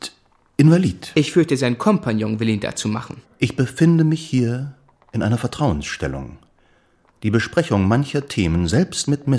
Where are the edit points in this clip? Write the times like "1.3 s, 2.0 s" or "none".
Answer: 3.2 s